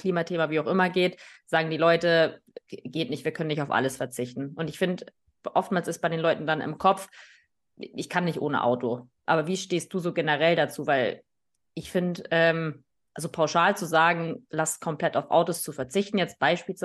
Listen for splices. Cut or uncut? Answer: uncut